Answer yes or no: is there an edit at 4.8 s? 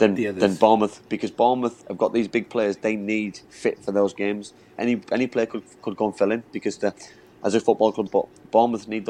yes